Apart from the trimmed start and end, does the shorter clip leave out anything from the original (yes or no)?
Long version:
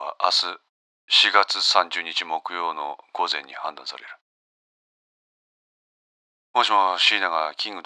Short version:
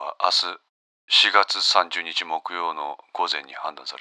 no